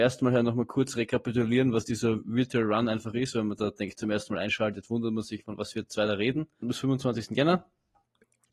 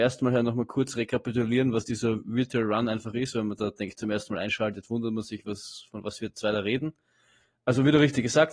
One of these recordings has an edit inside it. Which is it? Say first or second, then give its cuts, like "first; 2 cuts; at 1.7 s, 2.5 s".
first; 2 cuts; at 5.4 s, 6.6 s